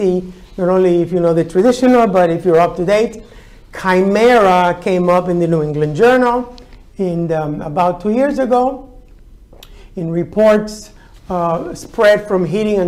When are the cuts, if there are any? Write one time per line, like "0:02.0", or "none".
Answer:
none